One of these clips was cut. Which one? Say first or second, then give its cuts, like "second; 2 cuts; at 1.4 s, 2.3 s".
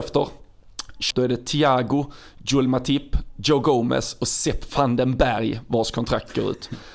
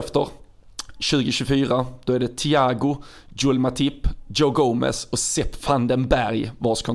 first; 1 cut; at 1.1 s